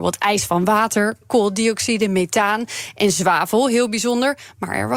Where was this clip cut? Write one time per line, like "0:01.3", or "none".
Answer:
0:01.2